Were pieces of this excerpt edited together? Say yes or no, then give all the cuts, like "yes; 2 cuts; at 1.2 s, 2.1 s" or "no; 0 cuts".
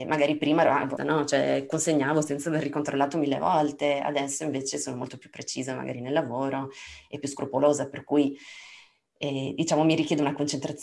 yes; 1 cut; at 1.0 s